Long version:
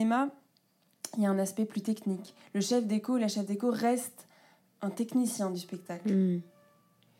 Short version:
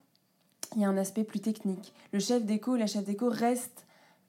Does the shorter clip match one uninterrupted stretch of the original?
yes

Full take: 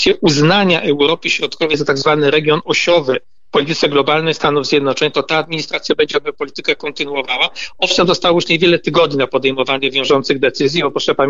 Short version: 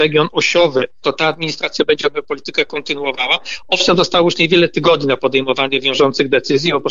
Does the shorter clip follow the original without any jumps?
no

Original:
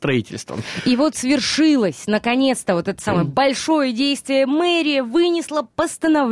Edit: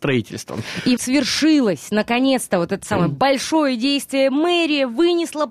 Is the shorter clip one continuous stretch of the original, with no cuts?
no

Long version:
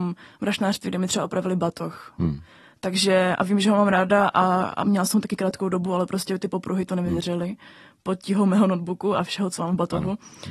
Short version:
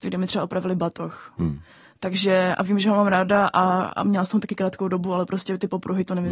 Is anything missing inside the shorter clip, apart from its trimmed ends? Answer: no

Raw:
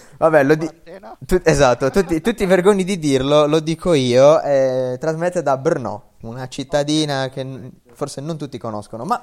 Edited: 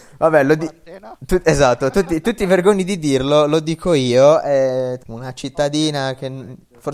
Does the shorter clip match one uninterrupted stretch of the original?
no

